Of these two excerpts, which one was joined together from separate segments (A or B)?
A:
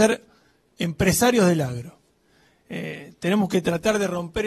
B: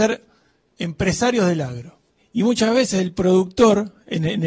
B